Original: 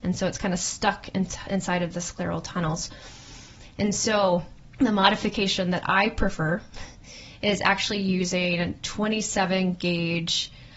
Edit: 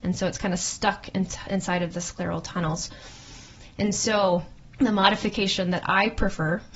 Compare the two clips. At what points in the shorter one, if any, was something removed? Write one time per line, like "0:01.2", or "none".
none